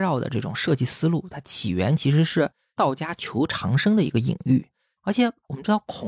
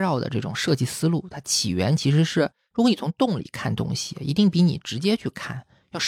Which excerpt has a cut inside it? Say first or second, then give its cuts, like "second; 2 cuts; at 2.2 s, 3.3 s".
second; 1 cut; at 2.7 s